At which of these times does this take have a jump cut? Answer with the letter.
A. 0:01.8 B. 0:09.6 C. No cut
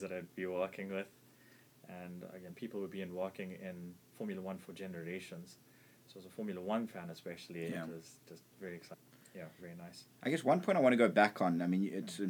B